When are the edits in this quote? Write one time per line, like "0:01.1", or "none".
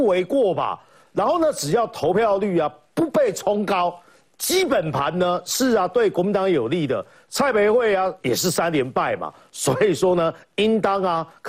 0:08.2

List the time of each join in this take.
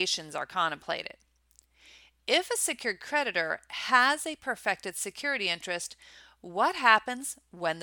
none

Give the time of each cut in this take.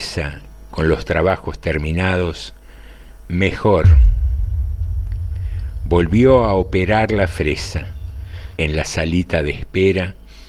0:03.2
0:08.6

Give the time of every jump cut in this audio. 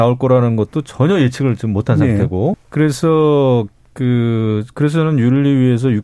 0:02.5

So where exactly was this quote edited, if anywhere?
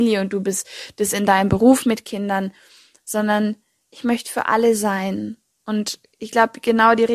none

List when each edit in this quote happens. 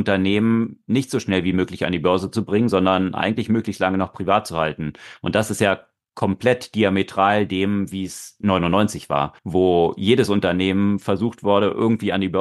0:09.4

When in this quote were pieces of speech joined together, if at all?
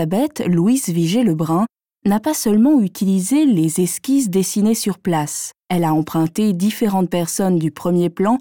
0:05.6

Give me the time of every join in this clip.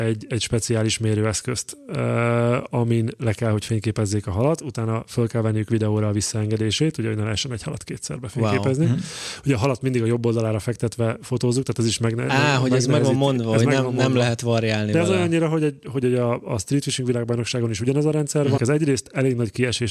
0:15.8
0:18.6

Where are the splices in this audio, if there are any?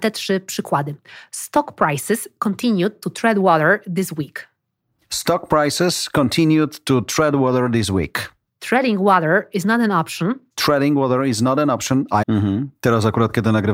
0:08.5
0:10.5
0:12.2

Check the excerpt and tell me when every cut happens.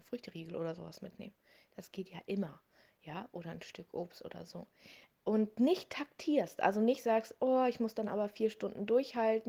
0:05.1

